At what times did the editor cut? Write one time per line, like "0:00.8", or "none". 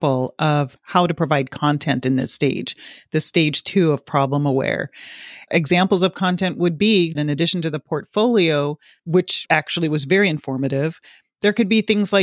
none